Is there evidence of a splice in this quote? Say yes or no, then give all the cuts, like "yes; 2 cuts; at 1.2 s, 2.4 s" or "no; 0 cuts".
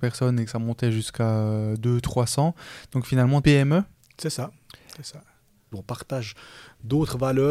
yes; 2 cuts; at 3.4 s, 5.7 s